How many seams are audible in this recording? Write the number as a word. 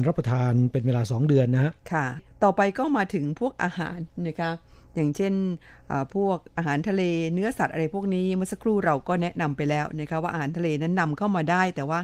zero